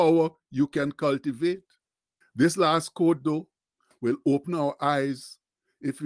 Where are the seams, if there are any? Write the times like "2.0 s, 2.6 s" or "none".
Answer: 2.2 s